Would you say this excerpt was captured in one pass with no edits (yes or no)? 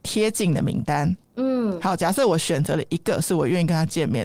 no